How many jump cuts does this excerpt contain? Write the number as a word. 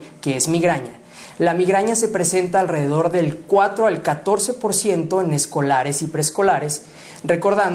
zero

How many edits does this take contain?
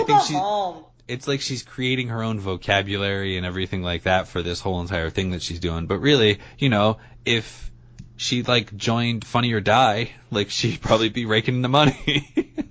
zero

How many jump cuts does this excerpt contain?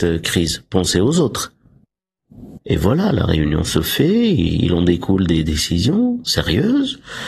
one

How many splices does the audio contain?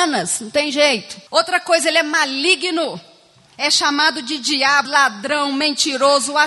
two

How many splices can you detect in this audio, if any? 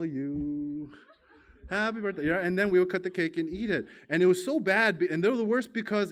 zero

